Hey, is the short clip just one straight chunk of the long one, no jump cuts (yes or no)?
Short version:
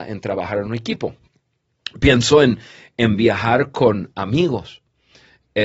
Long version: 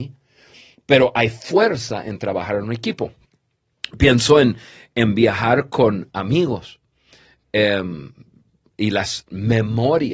yes